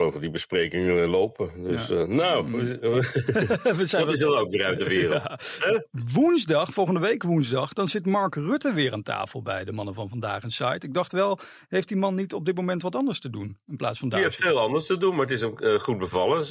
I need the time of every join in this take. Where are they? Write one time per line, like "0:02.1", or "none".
none

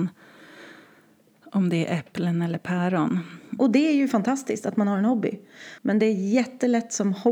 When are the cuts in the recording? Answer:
0:03.6
0:05.8

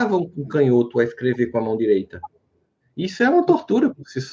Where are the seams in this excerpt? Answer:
none

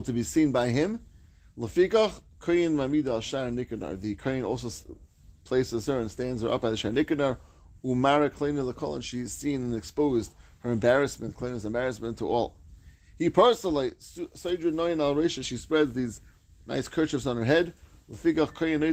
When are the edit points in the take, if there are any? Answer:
0:15.4

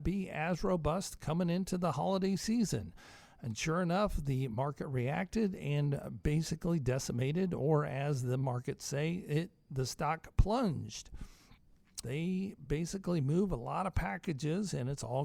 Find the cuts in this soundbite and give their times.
0:12.0

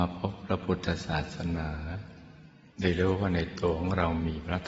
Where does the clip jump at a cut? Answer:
0:02.7

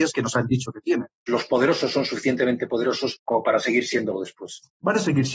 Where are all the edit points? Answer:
0:01.3

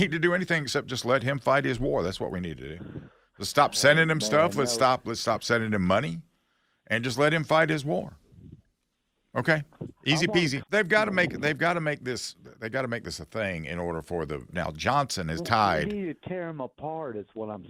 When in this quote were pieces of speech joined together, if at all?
0:10.6
0:14.5

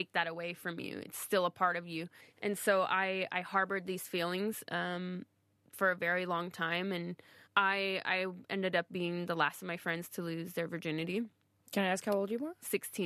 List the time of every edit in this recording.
none

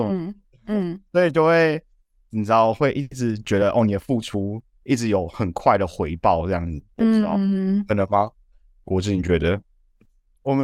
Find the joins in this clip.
none

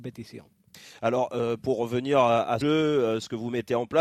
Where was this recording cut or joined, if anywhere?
0:02.6

